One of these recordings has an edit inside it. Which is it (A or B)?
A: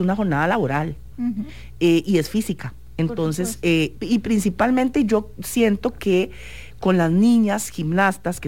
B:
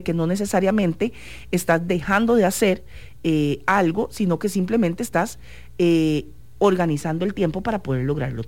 A